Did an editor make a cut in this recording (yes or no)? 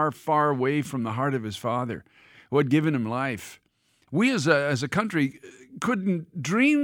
yes